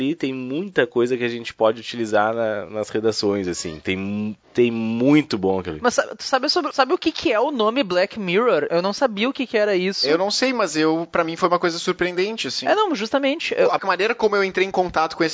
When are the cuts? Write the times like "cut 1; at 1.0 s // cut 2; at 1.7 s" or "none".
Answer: cut 1; at 13.8 s